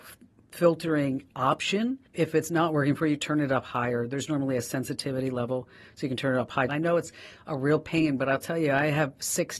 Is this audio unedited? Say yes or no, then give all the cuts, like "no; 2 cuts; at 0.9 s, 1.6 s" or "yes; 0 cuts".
no; 2 cuts; at 2.1 s, 6.7 s